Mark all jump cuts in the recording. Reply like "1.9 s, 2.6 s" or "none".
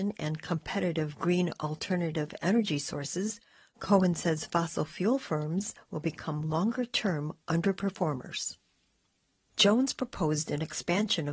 9.4 s